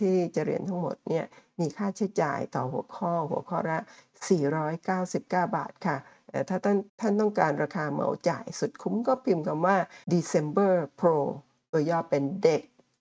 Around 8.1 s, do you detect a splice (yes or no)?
no